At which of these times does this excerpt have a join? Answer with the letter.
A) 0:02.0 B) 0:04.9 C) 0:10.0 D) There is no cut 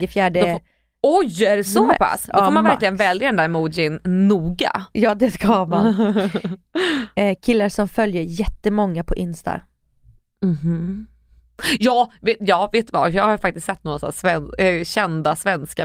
D